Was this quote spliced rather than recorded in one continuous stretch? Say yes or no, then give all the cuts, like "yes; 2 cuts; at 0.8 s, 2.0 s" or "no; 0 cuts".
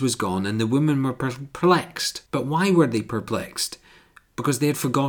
yes; 1 cut; at 2.3 s